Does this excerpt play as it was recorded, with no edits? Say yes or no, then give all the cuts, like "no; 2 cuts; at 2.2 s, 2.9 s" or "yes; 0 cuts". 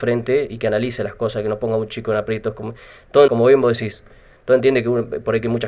no; 1 cut; at 3.3 s